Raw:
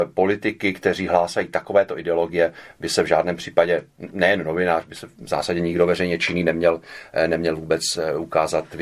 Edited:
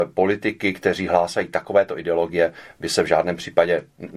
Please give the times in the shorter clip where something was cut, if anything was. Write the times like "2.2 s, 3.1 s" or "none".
none